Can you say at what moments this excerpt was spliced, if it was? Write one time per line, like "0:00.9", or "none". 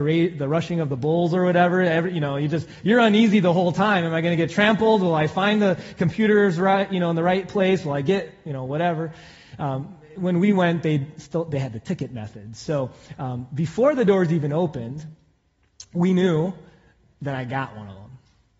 none